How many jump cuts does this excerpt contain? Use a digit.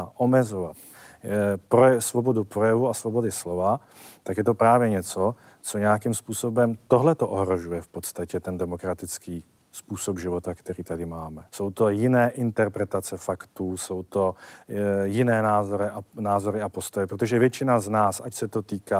1